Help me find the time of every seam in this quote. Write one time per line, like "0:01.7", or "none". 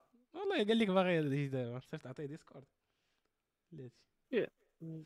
none